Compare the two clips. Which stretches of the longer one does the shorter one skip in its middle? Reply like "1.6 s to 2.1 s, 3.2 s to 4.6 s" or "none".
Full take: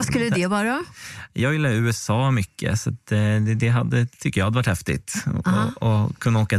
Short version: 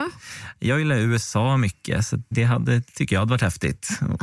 3.1 s to 3.6 s